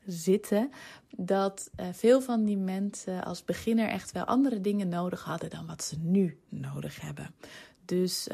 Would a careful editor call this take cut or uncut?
uncut